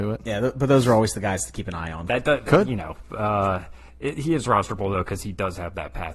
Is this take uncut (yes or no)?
no